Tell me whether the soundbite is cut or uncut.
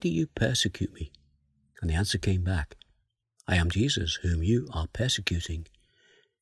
cut